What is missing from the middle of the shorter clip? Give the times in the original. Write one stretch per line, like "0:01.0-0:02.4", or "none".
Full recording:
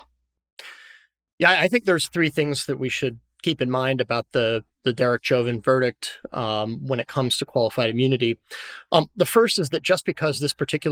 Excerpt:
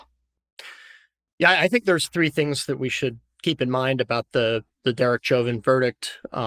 none

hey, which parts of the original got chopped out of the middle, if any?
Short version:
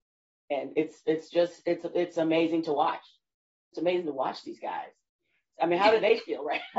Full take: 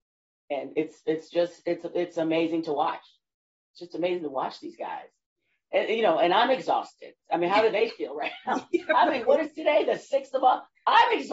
0:03.7-0:03.9
0:05.7-0:07.2

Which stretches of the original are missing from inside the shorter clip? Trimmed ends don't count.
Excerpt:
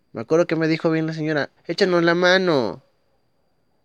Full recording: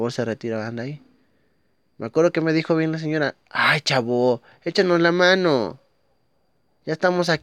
0:03.4-0:04.5

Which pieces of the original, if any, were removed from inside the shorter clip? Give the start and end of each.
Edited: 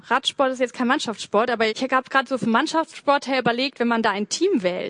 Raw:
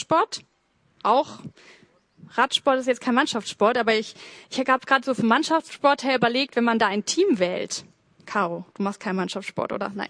0:04.0-0:04.5

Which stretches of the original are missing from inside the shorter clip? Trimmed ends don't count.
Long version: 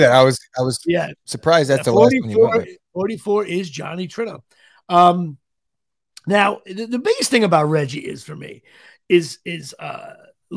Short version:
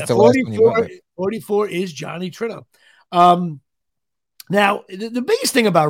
none

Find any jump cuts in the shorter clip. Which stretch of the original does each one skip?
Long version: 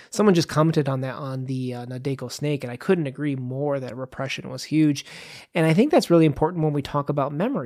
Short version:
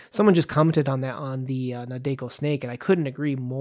none

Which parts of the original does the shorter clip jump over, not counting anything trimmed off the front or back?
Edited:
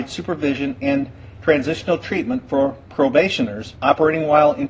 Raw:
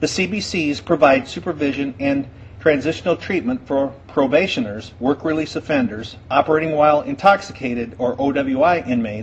0:04.9-0:06.2

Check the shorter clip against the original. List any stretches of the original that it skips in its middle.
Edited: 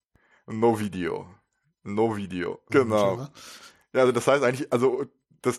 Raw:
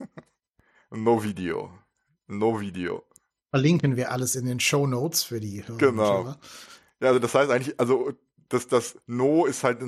0:03.1-0:05.8

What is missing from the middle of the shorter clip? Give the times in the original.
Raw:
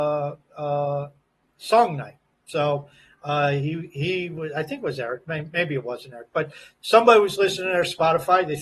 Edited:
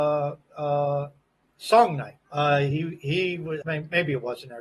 0:02.2-0:03.2
0:04.5-0:05.2

